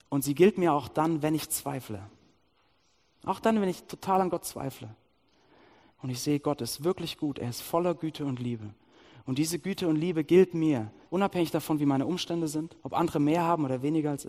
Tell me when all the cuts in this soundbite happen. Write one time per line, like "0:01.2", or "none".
0:05.9
0:11.0
0:12.8